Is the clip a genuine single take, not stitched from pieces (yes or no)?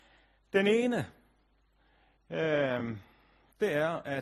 yes